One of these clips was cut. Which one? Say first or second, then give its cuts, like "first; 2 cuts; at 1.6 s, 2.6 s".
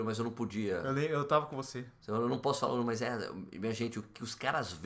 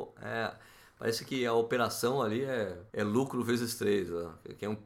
second; 1 cut; at 2.9 s